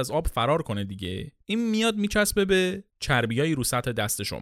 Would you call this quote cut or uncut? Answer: cut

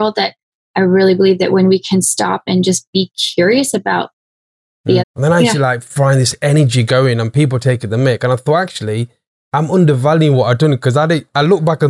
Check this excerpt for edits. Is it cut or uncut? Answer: cut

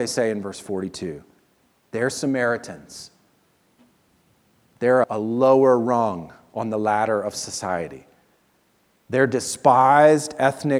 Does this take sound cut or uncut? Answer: cut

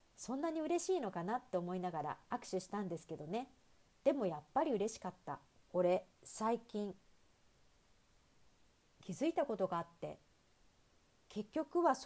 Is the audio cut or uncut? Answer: cut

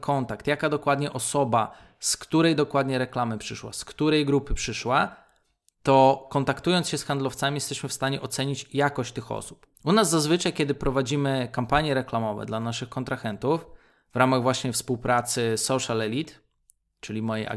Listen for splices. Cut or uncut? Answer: cut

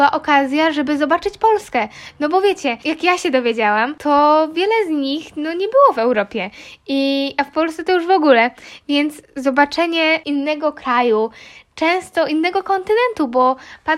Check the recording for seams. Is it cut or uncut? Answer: uncut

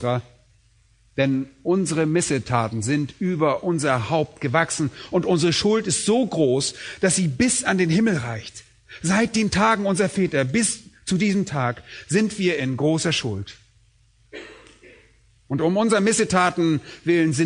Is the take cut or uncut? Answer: uncut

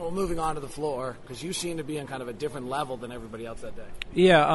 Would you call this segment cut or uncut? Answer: cut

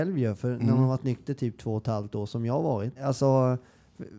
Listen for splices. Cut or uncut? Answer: cut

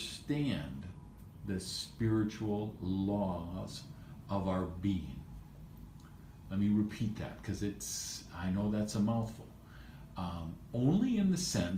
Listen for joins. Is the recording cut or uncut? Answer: uncut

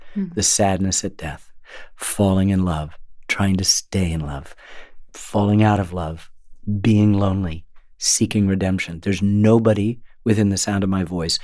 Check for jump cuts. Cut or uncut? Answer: uncut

